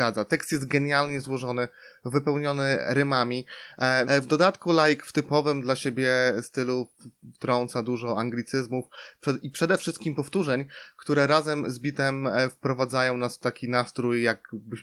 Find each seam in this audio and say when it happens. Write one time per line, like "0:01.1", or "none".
0:04.0